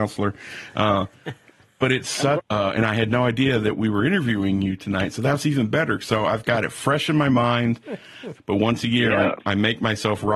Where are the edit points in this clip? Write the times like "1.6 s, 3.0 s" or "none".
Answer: 2.4 s, 8.4 s